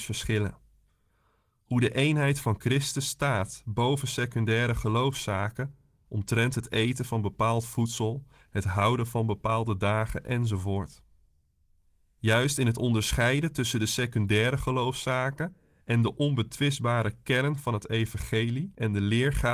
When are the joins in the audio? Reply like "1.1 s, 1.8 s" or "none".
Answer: none